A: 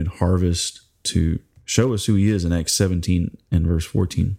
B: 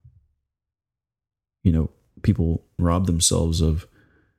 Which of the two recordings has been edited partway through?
B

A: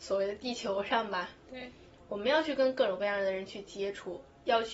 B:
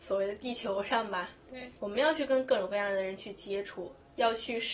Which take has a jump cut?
B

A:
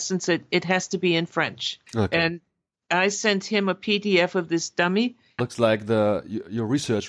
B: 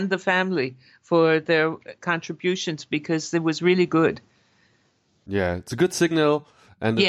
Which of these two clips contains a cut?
A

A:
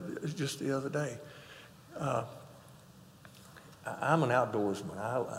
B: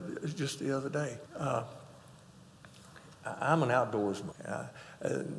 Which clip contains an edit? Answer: B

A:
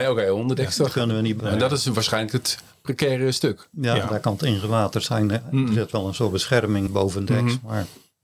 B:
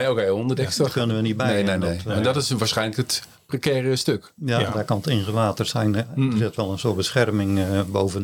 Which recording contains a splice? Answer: A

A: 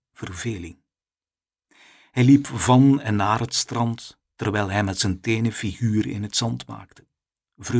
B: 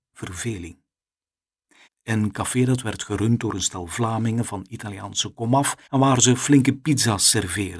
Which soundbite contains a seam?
B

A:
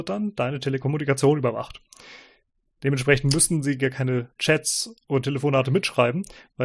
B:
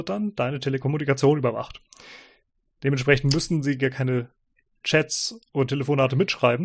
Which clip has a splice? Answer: A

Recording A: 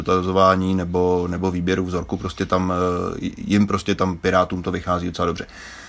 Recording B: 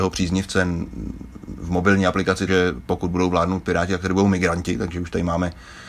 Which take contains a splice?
B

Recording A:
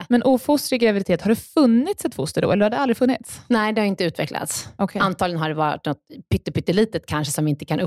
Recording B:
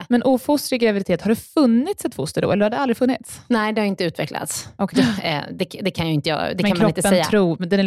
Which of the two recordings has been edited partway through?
B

